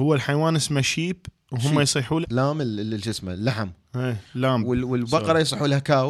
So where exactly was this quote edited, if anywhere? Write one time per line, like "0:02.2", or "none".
0:02.2